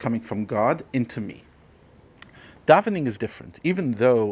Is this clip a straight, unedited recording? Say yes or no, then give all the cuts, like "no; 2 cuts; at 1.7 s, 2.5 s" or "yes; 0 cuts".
no; 1 cut; at 3.2 s